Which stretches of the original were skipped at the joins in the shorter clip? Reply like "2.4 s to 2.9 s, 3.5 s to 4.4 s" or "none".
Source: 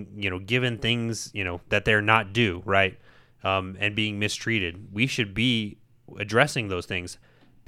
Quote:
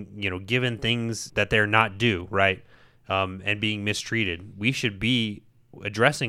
1.3 s to 1.6 s